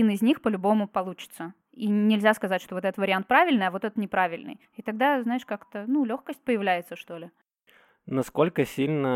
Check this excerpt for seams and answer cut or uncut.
cut